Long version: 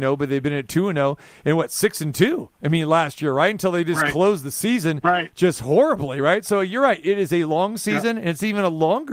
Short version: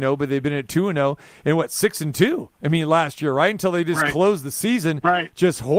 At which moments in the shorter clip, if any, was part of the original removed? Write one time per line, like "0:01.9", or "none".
none

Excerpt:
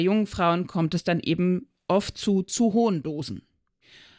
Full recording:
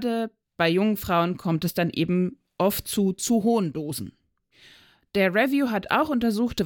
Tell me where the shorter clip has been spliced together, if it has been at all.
none

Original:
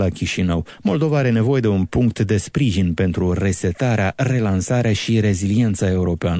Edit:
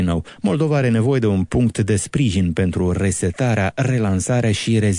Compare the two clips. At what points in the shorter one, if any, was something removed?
none

